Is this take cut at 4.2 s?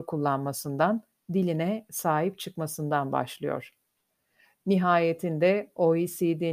no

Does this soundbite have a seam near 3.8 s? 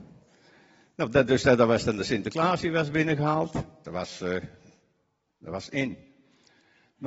yes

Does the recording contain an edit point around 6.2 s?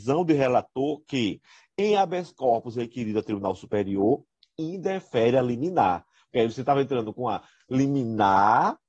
no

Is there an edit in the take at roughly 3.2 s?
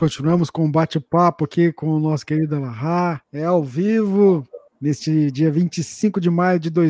yes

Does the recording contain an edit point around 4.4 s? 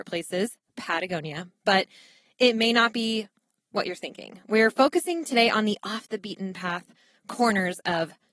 no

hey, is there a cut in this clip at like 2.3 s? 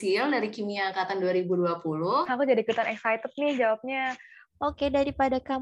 yes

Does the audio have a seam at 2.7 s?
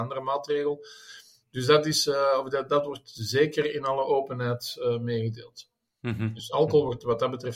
yes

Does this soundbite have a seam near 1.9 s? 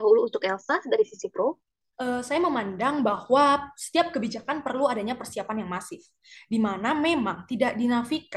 yes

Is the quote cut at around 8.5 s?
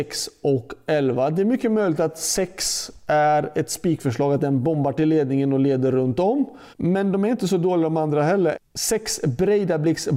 yes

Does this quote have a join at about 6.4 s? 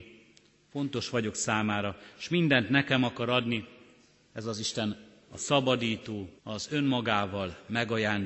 yes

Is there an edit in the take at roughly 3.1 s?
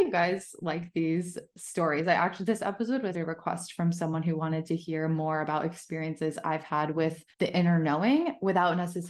yes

